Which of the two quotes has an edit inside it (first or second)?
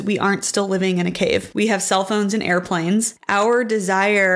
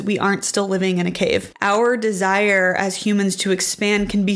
second